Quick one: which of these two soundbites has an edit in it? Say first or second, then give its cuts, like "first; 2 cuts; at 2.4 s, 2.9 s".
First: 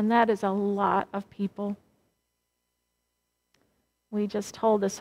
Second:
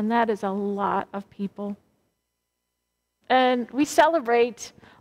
second; 1 cut; at 3.2 s